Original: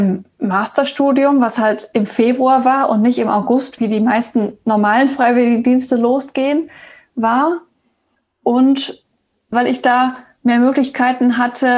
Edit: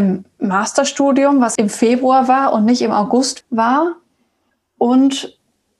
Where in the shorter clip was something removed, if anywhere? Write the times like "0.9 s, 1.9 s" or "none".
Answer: 1.6 s, 3.4 s